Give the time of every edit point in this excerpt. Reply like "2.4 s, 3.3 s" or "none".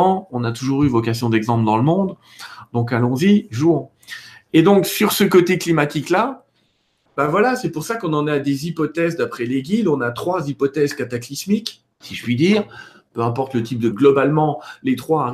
11.9 s, 13.9 s